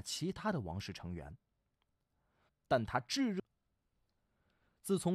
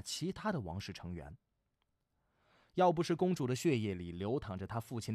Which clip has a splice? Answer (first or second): first